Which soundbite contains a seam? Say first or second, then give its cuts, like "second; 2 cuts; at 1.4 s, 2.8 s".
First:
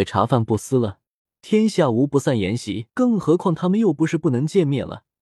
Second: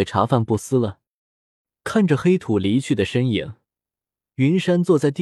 first; 2 cuts; at 1.2 s, 2.9 s